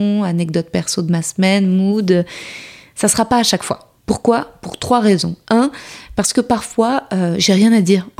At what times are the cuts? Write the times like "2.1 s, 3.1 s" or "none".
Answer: 4.0 s

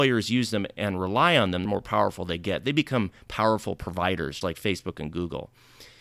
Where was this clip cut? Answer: 1.7 s, 4.4 s

